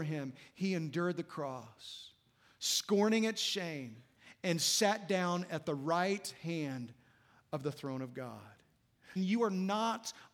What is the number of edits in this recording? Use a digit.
1